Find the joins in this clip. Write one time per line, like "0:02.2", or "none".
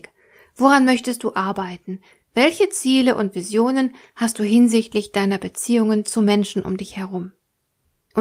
none